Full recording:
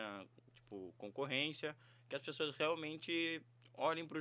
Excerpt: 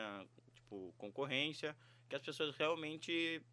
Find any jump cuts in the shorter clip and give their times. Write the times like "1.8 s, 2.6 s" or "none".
none